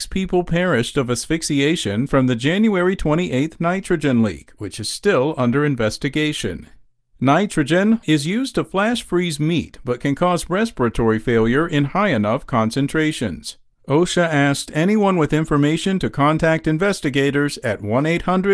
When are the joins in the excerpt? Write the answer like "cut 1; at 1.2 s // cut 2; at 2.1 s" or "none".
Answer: cut 1; at 8.0 s